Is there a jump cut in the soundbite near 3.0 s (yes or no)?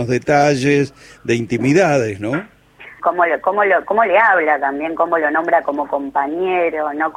yes